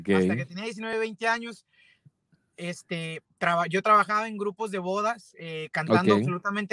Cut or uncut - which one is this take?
uncut